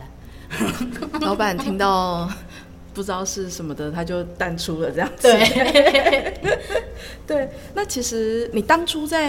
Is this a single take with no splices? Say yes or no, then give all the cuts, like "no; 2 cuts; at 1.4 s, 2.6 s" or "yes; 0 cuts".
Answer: yes; 0 cuts